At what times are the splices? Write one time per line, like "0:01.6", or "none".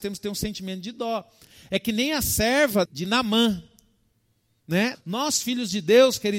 0:02.9
0:04.9